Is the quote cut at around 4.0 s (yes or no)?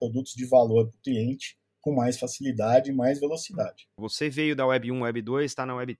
yes